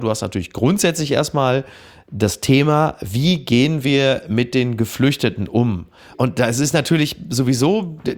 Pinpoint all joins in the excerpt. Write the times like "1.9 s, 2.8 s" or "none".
none